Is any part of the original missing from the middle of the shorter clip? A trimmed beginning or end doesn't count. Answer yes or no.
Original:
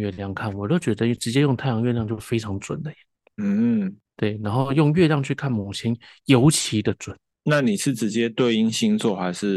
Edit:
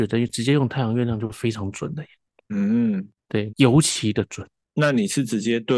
yes